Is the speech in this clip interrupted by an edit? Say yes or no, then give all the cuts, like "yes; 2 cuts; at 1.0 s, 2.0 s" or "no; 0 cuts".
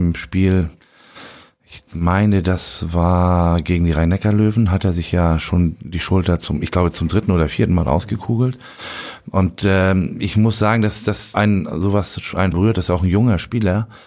yes; 2 cuts; at 11.3 s, 12.5 s